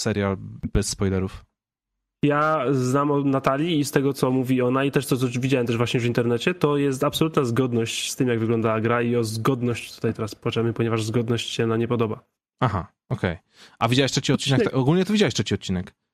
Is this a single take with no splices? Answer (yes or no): yes